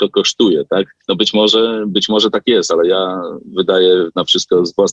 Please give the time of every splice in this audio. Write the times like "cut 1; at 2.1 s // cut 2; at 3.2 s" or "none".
cut 1; at 1.0 s